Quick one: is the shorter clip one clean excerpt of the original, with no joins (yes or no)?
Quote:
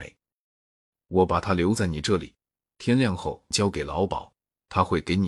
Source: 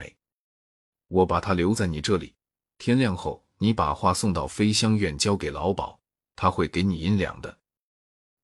no